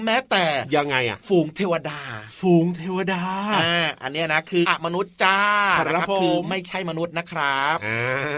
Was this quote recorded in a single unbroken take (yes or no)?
no